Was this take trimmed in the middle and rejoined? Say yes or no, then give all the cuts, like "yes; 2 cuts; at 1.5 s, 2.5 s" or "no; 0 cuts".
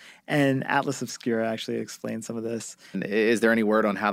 yes; 1 cut; at 2.9 s